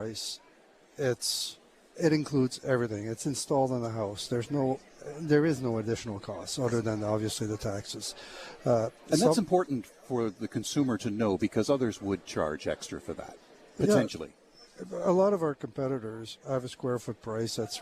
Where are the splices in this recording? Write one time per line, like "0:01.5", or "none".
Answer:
0:01.9